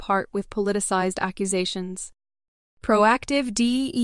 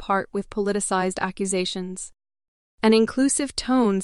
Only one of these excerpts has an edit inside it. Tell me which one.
first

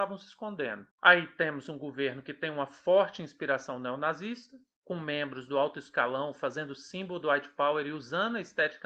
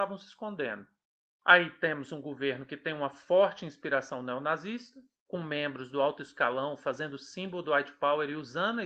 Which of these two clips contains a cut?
first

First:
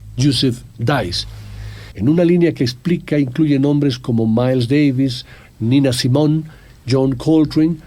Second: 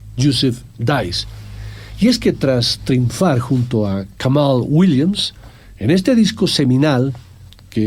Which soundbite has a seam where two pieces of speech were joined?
first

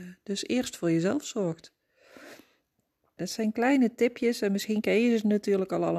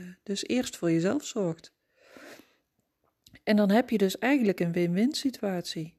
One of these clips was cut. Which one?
first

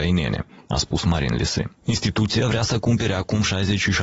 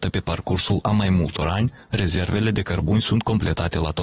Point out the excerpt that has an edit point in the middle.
first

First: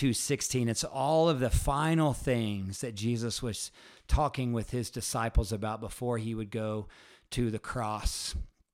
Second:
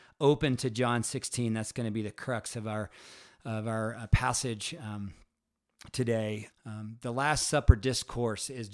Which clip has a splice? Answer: second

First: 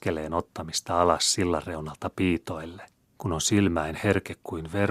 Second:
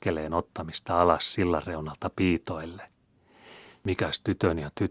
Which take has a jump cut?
first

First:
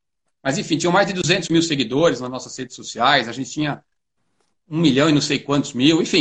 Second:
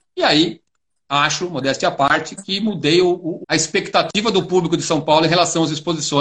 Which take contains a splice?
second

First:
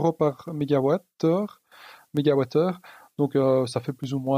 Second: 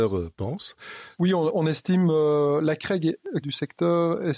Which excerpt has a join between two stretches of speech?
second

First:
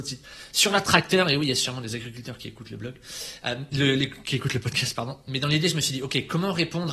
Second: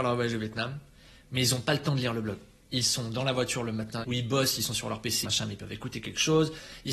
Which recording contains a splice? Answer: second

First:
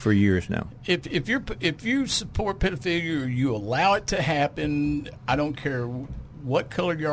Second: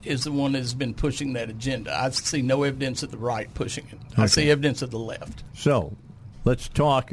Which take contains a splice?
second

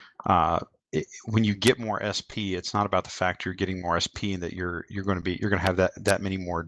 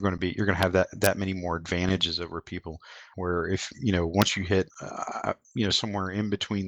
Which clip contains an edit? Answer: second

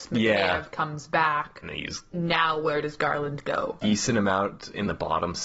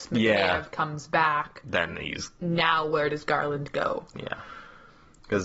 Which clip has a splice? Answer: first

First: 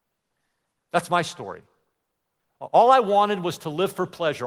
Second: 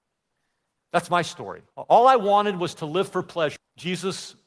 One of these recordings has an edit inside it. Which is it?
second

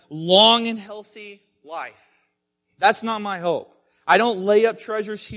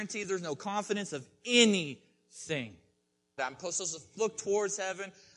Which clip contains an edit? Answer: second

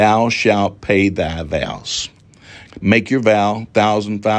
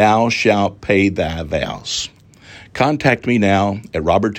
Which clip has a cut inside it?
first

